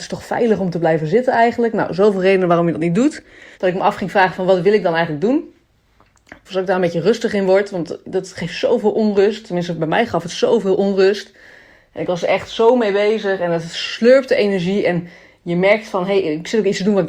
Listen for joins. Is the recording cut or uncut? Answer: cut